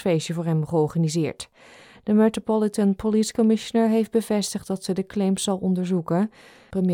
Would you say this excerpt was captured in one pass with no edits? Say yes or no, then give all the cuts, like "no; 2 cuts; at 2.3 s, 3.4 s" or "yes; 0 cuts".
yes; 0 cuts